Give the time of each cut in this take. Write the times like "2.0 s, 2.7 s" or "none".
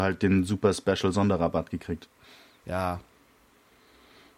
2.6 s